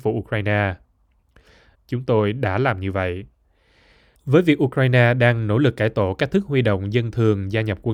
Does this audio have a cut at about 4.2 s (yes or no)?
no